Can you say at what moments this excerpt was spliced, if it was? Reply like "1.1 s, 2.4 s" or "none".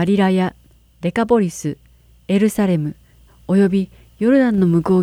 3.3 s